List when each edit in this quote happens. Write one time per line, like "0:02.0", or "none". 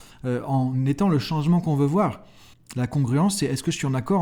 0:02.5